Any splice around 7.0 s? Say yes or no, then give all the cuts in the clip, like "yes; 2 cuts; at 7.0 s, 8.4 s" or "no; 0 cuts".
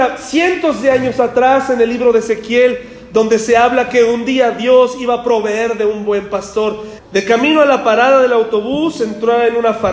yes; 1 cut; at 7.0 s